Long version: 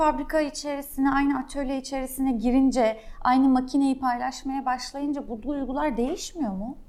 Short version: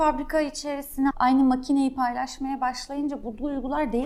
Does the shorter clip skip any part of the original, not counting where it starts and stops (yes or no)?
yes